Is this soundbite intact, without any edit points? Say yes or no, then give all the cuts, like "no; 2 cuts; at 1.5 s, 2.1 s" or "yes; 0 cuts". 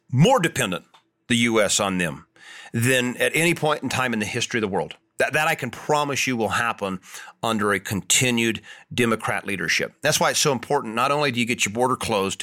yes; 0 cuts